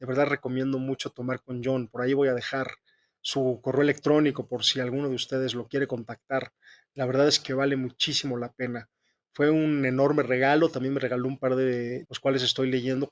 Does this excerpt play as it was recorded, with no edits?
no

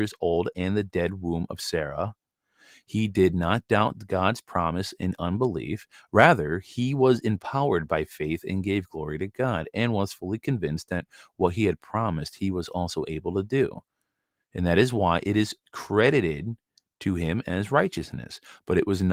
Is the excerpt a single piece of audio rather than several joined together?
yes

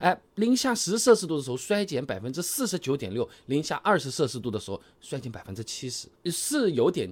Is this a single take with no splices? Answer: no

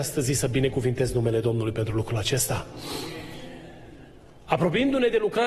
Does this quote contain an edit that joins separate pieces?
no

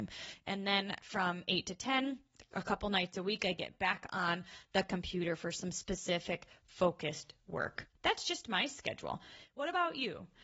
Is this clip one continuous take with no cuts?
yes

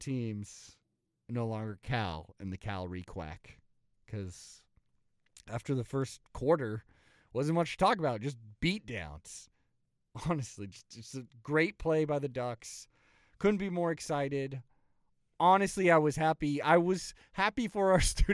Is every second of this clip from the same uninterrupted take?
yes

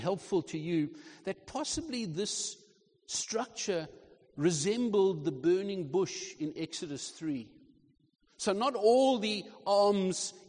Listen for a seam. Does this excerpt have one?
no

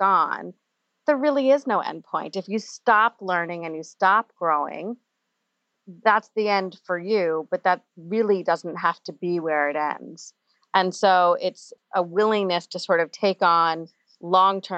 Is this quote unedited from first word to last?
yes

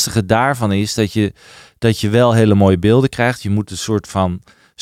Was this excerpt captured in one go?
yes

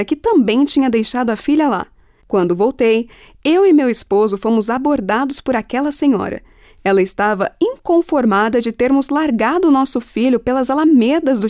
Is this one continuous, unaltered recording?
no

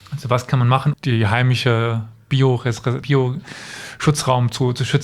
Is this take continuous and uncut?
no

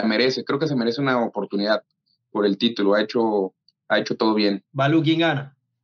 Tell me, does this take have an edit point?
yes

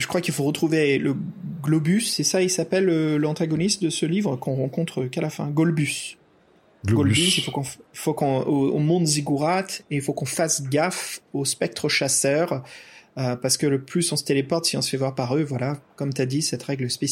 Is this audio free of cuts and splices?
yes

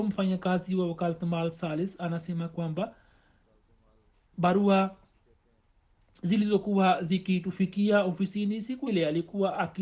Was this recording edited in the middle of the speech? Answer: yes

